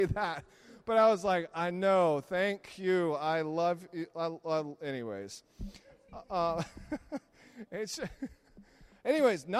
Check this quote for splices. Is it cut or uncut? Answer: uncut